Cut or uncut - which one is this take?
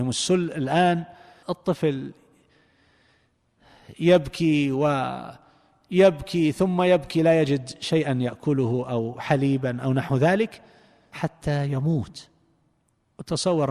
uncut